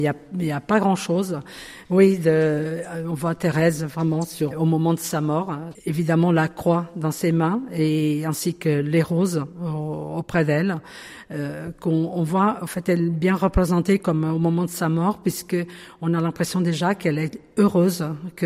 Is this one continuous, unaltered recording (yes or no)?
no